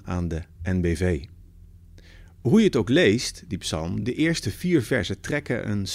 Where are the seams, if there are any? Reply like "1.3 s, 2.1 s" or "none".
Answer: none